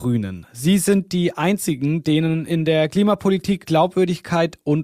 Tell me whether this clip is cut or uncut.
cut